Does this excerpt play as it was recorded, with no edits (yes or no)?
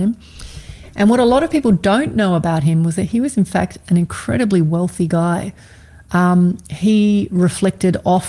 yes